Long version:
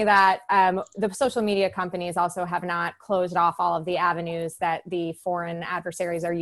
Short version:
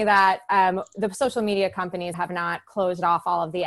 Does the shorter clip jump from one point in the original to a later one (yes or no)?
yes